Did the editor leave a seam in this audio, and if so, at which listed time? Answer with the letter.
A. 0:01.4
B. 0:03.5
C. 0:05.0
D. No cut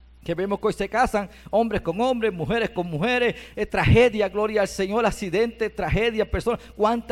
B